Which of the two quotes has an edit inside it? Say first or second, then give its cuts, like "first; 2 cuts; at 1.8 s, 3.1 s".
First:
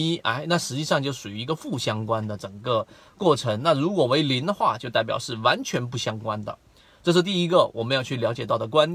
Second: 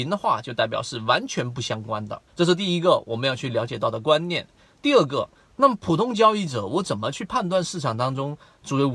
second; 1 cut; at 2.3 s